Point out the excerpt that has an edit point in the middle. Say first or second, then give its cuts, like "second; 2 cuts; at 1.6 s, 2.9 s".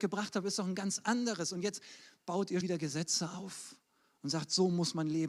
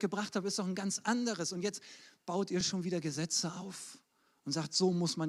first; 1 cut; at 2.6 s